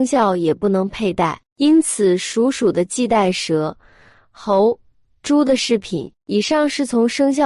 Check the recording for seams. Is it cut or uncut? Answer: uncut